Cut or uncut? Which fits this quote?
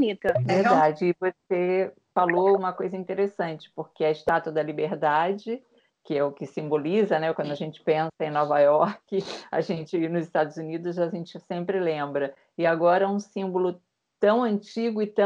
uncut